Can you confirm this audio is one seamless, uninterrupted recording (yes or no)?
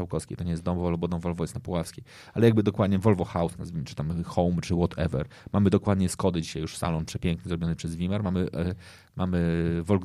yes